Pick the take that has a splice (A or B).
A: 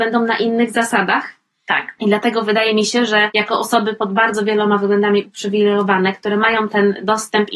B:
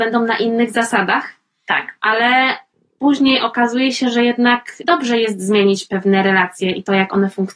A